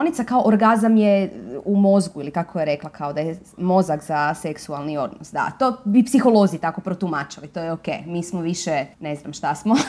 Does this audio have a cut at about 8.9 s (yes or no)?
yes